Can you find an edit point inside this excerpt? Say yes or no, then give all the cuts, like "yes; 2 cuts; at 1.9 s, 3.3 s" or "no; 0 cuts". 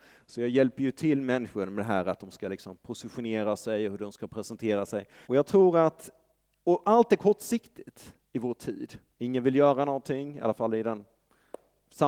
yes; 2 cuts; at 5.2 s, 9.1 s